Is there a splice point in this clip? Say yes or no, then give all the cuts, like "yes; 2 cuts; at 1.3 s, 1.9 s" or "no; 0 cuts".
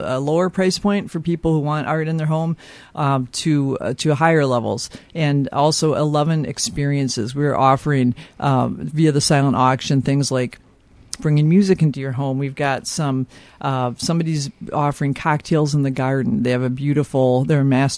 no; 0 cuts